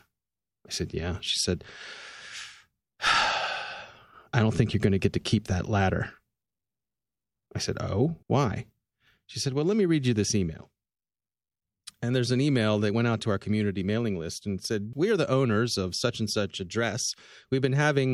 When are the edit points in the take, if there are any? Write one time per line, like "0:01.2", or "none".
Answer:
0:08.2
0:14.9